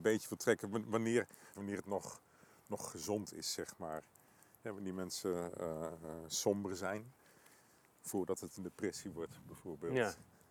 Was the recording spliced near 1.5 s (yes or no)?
yes